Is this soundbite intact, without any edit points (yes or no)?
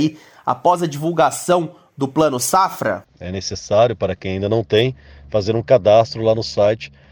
no